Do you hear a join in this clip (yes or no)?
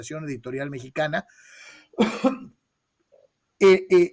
no